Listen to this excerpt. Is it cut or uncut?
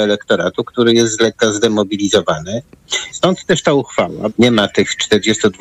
cut